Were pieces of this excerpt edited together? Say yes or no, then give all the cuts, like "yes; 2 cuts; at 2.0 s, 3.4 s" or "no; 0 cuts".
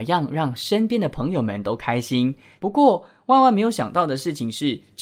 yes; 1 cut; at 2.6 s